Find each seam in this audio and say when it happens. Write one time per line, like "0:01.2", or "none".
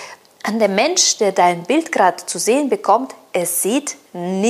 none